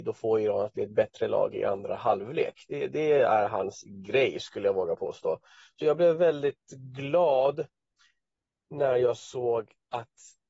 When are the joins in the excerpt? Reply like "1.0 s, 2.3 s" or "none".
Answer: 5.8 s